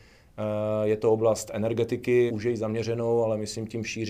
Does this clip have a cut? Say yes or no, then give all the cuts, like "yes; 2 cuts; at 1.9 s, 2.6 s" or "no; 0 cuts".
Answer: yes; 1 cut; at 2.3 s